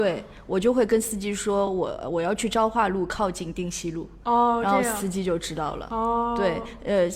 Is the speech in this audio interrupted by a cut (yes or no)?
no